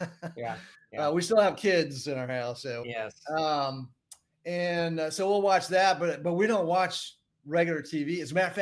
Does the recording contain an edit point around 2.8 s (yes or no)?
yes